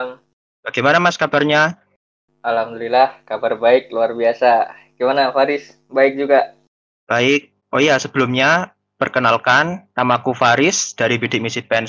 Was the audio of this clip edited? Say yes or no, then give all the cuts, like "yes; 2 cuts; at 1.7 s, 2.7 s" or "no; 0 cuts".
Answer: yes; 2 cuts; at 7.6 s, 9.9 s